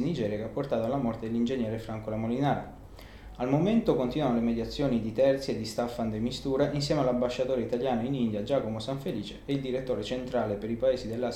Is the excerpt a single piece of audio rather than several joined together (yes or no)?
yes